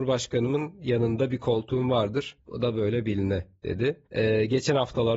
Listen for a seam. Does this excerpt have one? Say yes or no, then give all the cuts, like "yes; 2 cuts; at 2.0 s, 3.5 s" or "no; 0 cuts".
yes; 1 cut; at 4.1 s